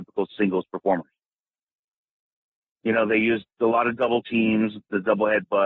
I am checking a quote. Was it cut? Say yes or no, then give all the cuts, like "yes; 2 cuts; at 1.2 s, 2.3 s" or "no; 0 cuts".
no; 0 cuts